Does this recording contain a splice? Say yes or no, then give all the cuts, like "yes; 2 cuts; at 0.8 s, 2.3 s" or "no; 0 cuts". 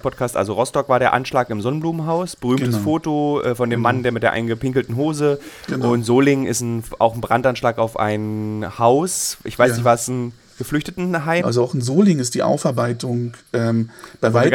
yes; 1 cut; at 11.4 s